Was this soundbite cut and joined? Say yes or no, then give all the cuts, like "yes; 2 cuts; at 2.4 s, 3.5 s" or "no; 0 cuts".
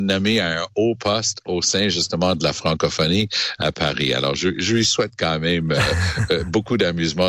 no; 0 cuts